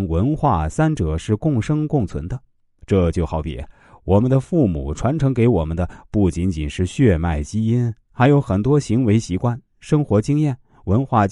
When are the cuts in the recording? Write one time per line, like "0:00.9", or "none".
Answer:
none